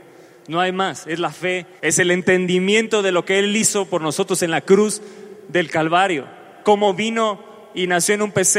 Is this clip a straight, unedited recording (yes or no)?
no